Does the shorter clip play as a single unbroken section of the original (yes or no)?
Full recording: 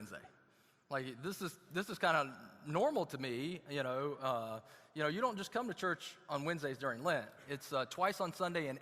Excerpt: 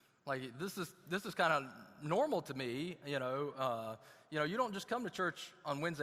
yes